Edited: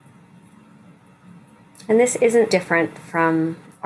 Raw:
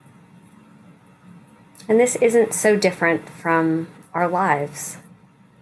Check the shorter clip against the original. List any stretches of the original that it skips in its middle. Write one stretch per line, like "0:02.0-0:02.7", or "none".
0:02.5-0:02.8